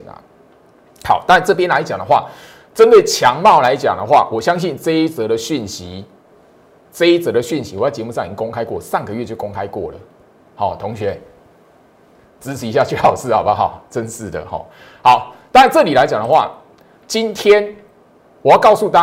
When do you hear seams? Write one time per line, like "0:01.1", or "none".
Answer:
0:10.4